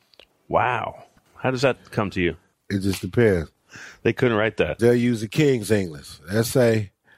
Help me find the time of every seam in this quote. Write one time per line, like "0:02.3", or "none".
0:02.5
0:04.8